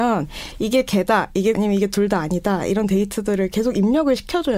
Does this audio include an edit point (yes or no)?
yes